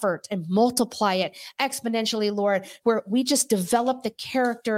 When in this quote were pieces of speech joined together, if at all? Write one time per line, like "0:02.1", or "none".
none